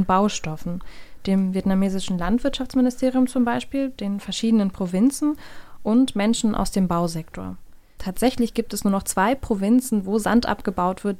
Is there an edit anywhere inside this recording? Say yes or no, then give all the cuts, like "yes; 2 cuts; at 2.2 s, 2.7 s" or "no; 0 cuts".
yes; 1 cut; at 8.0 s